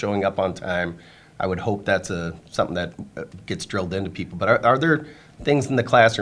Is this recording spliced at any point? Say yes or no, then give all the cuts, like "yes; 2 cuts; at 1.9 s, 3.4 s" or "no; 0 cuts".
no; 0 cuts